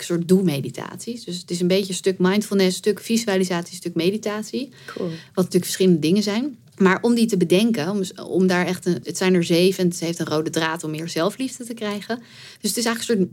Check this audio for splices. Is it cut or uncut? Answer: cut